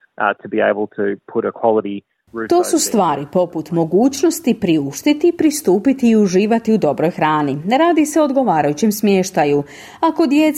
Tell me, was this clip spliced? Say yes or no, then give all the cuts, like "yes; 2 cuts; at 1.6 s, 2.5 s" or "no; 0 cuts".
no; 0 cuts